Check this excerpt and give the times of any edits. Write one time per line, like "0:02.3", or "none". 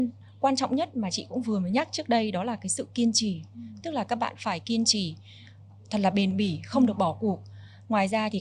none